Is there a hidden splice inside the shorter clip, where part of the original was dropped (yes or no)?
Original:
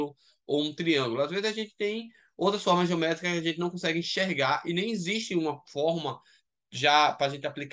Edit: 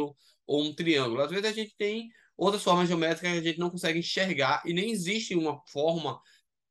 no